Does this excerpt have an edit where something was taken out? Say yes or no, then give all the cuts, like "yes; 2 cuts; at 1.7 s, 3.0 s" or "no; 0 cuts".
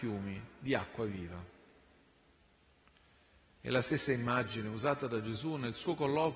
no; 0 cuts